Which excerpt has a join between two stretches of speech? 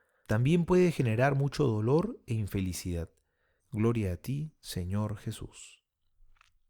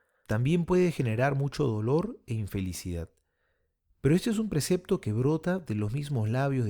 first; 1 cut; at 3.6 s

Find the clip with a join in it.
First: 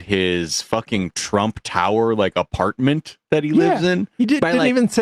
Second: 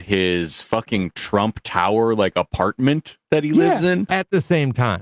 second; 1 cut; at 4.1 s

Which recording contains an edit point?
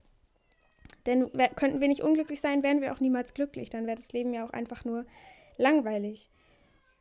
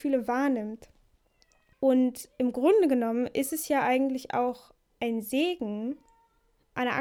second; 1 cut; at 1.7 s

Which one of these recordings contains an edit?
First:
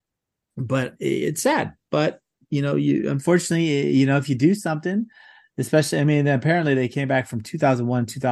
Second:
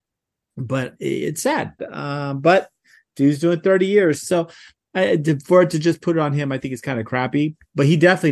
second; 2 cuts; at 1.8 s, 4.2 s

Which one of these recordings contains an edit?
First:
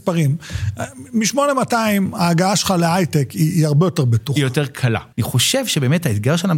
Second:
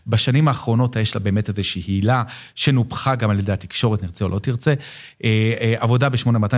first; 1 cut; at 5.1 s

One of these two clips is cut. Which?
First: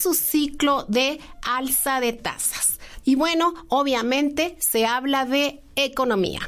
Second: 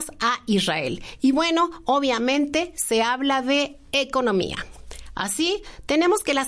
first; 1 cut; at 3.0 s

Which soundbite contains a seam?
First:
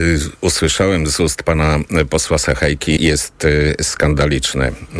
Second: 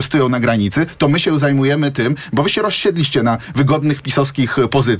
first; 1 cut; at 3.0 s

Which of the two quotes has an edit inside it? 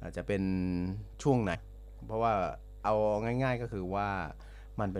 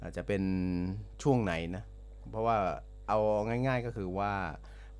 first; 1 cut; at 1.5 s

